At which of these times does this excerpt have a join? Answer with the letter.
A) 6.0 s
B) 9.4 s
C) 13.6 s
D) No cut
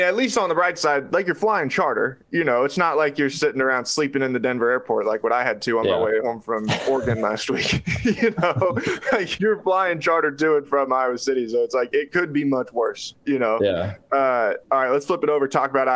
B